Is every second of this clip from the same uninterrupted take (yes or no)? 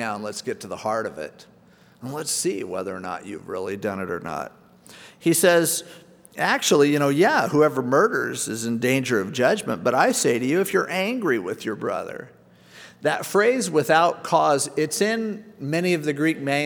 no